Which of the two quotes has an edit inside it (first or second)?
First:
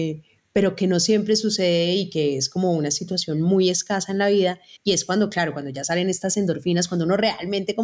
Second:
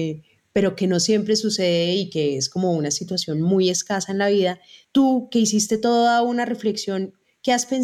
first